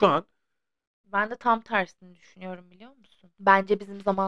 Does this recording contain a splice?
yes; 1 cut; at 3.3 s

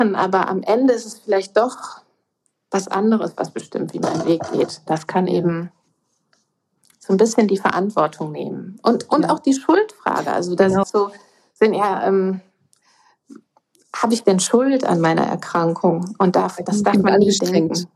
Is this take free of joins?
no; 1 cut; at 10.8 s

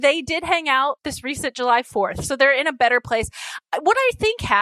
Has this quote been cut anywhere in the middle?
yes; 1 cut; at 1.0 s

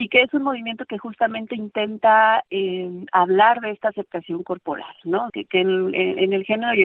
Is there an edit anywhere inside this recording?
yes; 1 cut; at 5.3 s

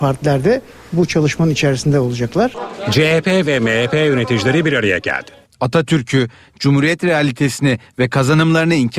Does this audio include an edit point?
yes; 1 cut; at 5.4 s

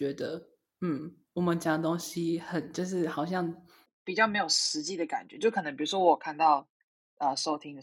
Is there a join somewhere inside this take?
yes; 1 cut; at 3.9 s

